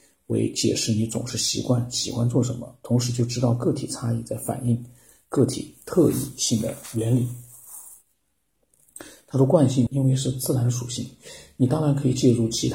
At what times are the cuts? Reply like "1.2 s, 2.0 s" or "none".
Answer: 9.9 s